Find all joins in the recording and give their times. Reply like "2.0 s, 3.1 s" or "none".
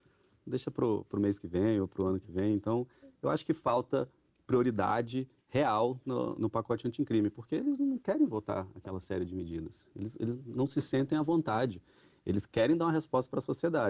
6.4 s